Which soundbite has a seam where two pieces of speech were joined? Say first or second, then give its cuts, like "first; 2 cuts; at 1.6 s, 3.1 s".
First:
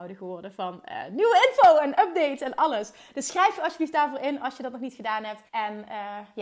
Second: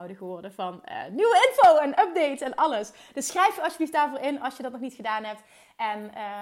first; 1 cut; at 5.5 s